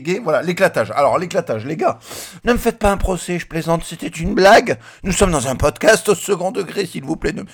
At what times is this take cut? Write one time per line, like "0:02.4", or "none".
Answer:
0:02.4

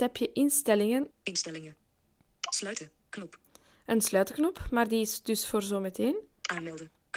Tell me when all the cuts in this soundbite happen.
0:01.1

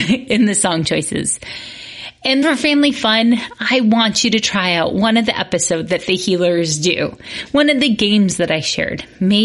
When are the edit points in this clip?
0:02.4

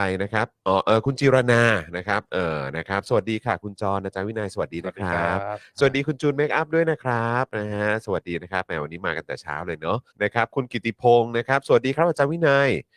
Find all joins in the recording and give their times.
0:10.1

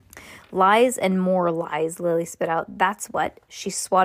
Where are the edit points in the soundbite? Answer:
none

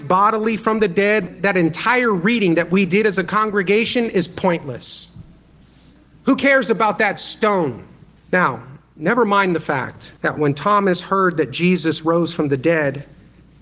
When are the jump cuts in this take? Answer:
0:08.2
0:10.2

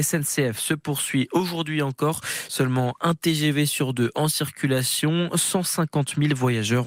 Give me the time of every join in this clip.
none

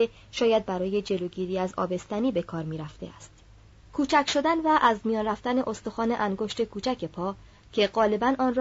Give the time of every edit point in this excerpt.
0:03.9

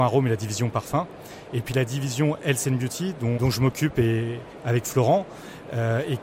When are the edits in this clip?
0:03.4

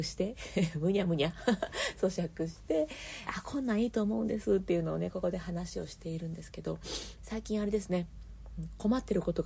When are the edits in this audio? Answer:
0:03.3
0:07.2

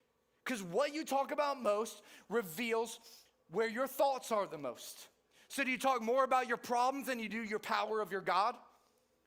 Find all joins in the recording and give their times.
none

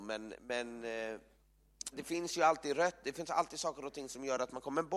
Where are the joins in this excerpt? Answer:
0:01.9

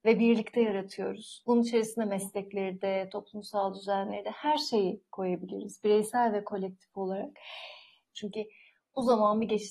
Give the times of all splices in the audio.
0:01.4
0:08.1

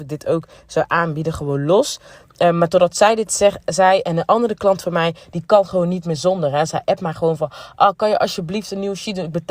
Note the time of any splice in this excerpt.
none

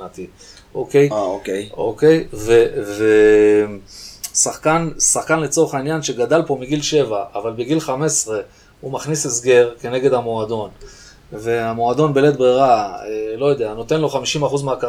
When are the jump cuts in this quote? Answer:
none

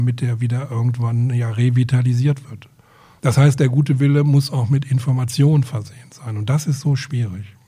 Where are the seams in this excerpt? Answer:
0:03.2

